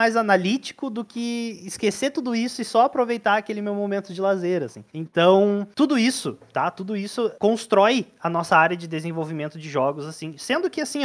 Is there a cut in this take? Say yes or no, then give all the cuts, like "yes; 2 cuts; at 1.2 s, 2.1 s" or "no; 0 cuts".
yes; 1 cut; at 4.9 s